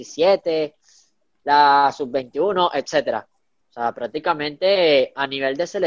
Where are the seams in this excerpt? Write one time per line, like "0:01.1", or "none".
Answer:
0:03.6